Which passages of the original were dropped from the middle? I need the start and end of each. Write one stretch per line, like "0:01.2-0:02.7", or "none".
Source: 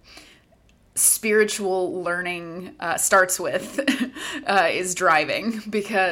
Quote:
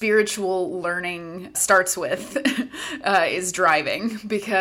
0:02.8-0:03.0